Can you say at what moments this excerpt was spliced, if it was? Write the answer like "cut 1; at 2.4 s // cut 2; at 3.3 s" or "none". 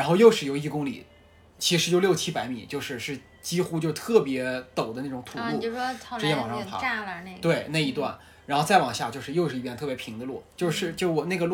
none